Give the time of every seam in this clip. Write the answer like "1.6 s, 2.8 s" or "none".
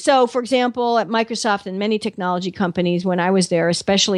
none